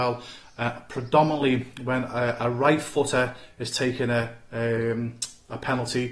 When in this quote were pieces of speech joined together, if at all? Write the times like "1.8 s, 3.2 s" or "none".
none